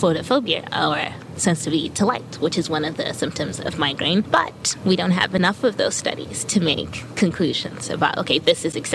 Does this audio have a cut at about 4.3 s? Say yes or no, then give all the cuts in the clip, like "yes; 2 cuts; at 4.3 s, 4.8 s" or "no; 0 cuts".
yes; 1 cut; at 4.3 s